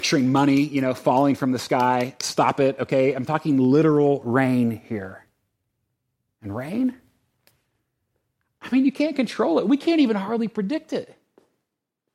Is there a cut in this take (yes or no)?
no